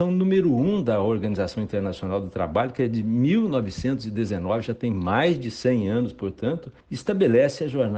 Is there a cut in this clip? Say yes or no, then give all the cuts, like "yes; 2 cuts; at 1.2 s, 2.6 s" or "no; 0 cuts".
yes; 1 cut; at 6.8 s